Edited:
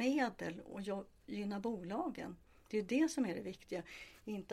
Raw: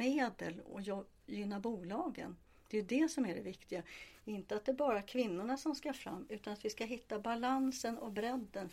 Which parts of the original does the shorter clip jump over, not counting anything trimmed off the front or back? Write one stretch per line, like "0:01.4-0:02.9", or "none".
none